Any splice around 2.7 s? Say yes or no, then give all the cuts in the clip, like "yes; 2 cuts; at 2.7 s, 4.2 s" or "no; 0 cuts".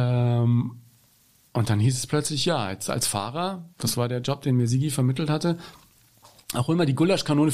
no; 0 cuts